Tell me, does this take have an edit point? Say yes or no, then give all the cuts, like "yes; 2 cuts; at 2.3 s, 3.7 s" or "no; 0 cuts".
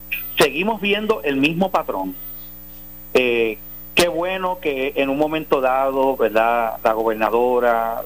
no; 0 cuts